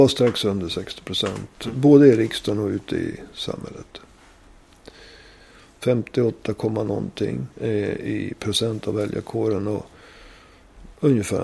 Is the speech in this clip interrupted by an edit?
yes; 1 cut; at 7.5 s

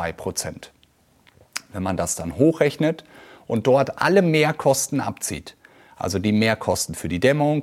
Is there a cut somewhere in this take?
no; 0 cuts

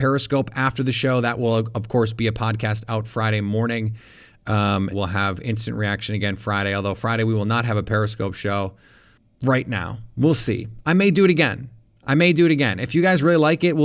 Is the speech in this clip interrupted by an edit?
yes; 1 cut; at 4.9 s

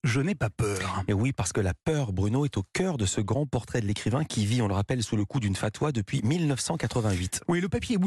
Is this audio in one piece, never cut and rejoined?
yes; 0 cuts

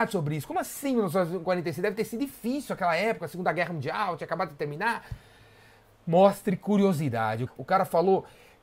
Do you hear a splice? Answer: yes; 1 cut; at 7.5 s

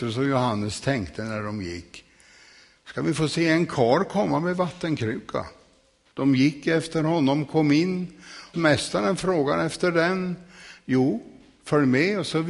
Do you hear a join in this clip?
yes; 2 cuts; at 6.1 s, 8.5 s

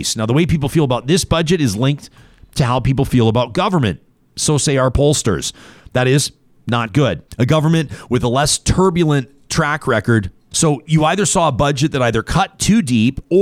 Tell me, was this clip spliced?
yes; 2 cuts; at 7.3 s, 10.5 s

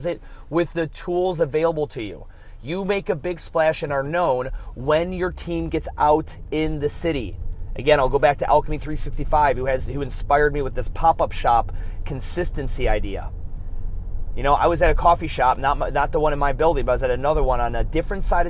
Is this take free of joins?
yes; 0 cuts

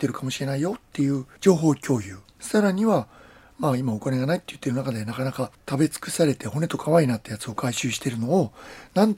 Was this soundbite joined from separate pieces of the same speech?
no; 0 cuts

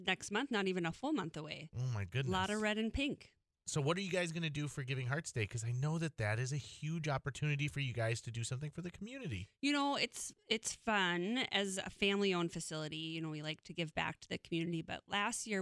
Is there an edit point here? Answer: no; 0 cuts

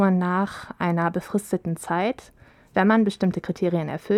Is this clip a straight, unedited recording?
yes; 0 cuts

